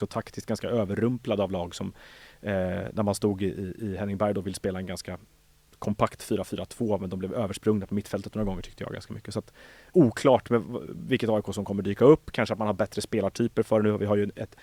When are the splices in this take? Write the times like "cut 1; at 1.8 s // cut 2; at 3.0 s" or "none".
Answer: cut 1; at 9.9 s